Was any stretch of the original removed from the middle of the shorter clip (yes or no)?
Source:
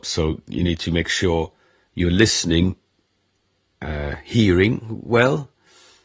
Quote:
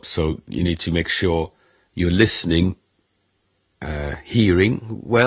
no